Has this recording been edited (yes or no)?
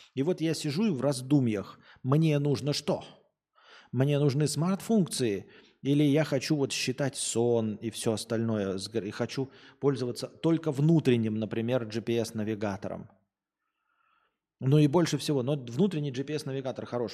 no